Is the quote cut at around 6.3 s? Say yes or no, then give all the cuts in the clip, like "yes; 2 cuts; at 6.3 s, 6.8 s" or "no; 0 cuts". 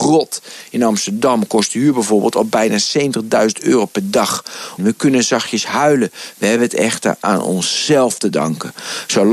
yes; 2 cuts; at 4.8 s, 6.3 s